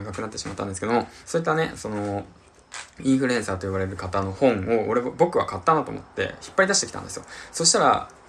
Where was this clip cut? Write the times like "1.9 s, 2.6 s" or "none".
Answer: 1.2 s